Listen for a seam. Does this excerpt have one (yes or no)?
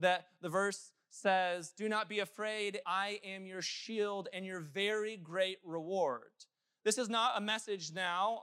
yes